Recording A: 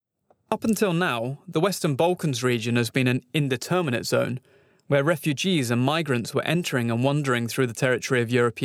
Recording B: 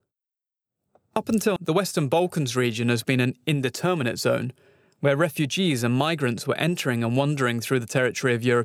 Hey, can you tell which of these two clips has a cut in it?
B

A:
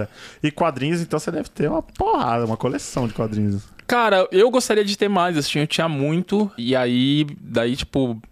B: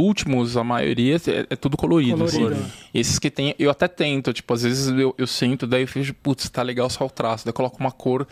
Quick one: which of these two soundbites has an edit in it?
A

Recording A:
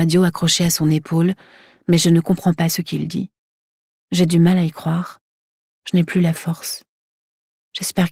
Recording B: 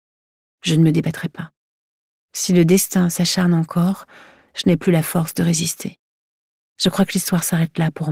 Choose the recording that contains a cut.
A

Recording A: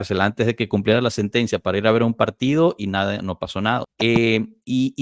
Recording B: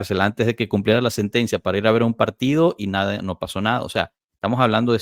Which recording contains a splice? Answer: A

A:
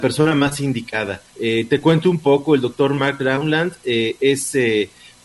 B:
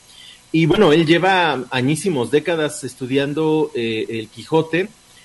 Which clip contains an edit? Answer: A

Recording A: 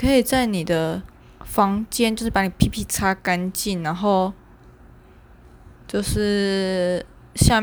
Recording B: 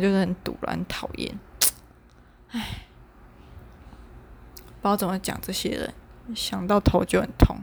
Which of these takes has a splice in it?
A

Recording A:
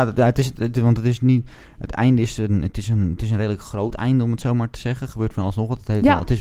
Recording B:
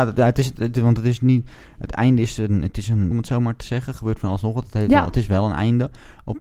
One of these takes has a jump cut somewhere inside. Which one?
B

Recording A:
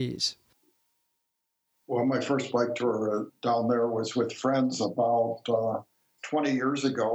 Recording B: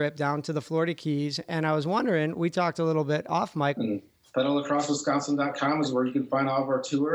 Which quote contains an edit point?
B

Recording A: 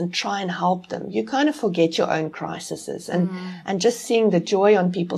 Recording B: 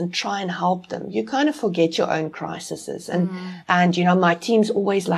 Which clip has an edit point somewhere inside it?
B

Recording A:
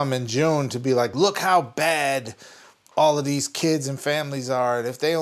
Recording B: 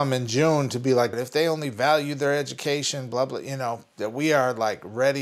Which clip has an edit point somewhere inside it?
B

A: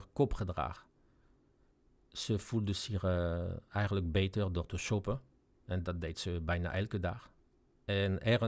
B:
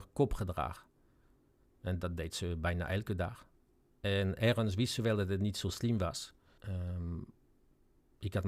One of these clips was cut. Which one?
B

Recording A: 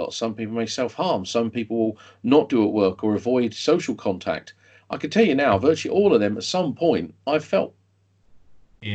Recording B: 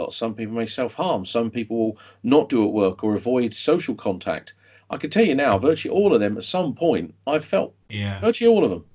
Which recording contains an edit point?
B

